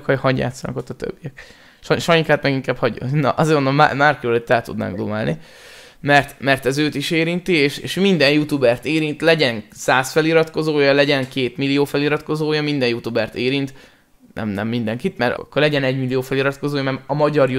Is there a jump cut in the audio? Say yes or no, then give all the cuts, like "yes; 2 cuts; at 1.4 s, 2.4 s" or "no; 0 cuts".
yes; 1 cut; at 15.4 s